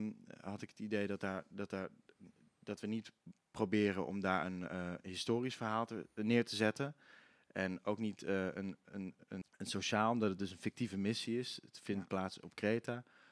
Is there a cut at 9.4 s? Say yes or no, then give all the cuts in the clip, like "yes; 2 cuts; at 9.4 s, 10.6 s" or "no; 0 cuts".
yes; 1 cut; at 9.4 s